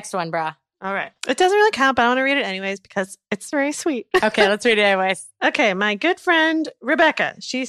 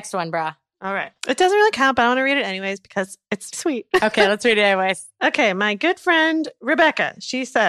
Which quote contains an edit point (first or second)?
second